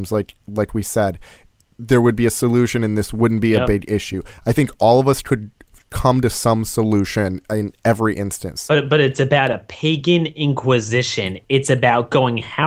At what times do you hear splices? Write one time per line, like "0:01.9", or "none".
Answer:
none